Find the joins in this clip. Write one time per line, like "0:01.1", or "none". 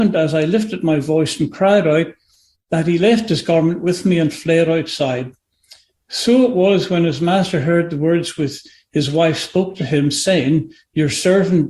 none

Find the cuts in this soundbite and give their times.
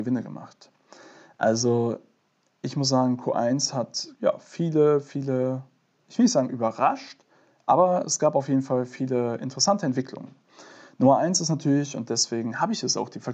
0:04.1

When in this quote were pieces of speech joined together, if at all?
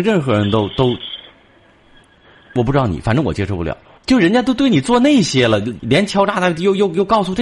0:04.0
0:05.8

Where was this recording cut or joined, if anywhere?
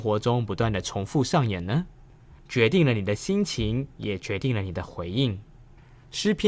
0:02.4

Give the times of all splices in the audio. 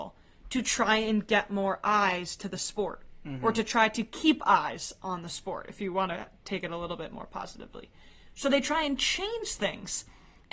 none

